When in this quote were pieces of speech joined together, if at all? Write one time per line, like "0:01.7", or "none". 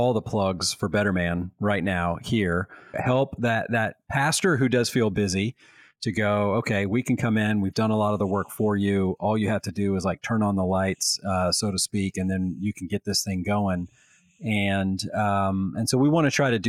0:02.9